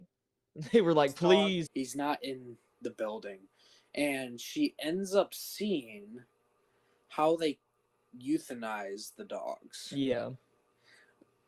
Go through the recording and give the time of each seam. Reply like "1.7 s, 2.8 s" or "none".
1.7 s

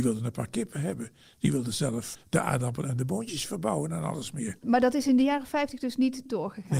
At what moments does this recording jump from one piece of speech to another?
2.1 s, 4.6 s

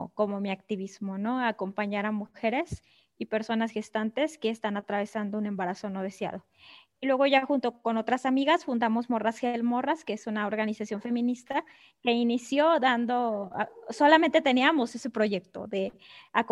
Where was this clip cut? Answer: none

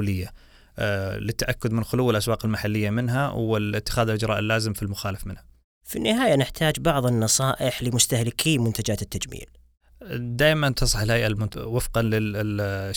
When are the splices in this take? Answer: 11.5 s

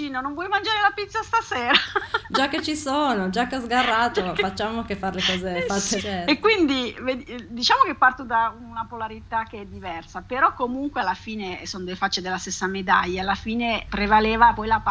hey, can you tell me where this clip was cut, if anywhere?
6.0 s

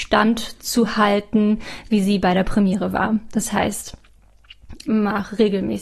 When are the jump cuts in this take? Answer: 4.9 s

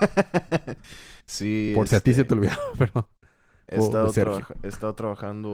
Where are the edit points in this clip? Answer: none

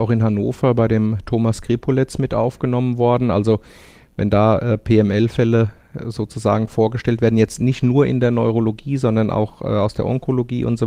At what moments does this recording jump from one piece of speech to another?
none

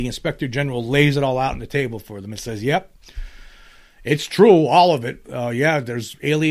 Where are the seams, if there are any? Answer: none

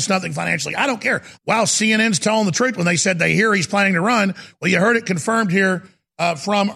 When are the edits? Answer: 1.4 s

